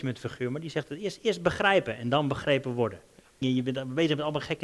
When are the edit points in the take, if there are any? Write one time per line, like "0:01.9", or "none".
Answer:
0:03.4